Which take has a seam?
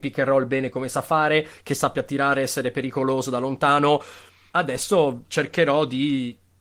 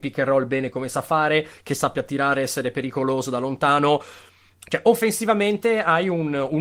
first; 1 cut; at 4.5 s

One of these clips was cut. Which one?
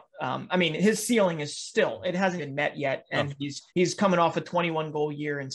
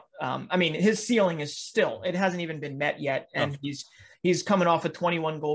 first; 2 cuts; at 2.4 s, 3.7 s

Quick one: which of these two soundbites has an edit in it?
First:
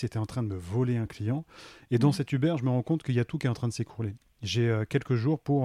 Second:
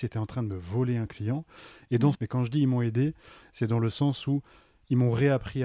second; 1 cut; at 2.1 s

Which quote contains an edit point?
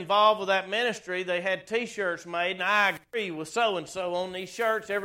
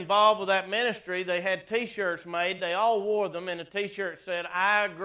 first; 1 cut; at 2.6 s

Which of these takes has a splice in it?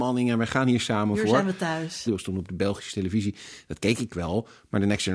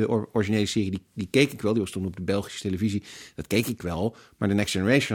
first; 1 cut; at 2.1 s

